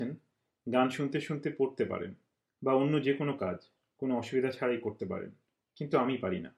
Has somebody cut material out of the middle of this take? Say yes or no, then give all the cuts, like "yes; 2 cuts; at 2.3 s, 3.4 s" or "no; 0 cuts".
no; 0 cuts